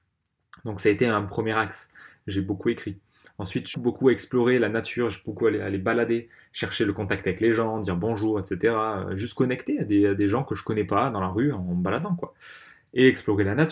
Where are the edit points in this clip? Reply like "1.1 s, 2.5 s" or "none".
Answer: 3.7 s